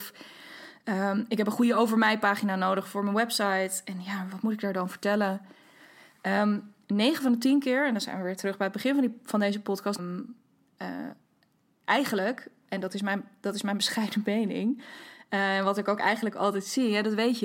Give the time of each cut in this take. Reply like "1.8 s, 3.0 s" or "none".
10.0 s